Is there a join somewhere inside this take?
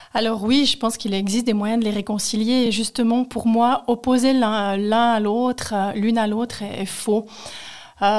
no; 0 cuts

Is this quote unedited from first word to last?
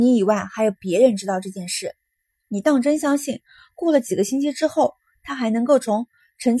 no; 1 cut; at 2.4 s

